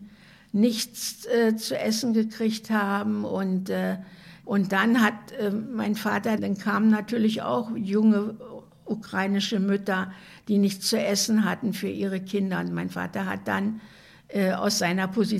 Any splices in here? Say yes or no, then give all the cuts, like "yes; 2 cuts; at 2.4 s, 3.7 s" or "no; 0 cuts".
yes; 1 cut; at 6.4 s